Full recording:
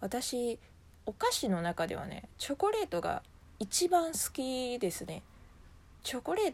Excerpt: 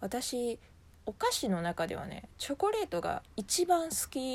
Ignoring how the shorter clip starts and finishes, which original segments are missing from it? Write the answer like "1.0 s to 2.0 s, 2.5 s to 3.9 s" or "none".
3.3 s to 3.5 s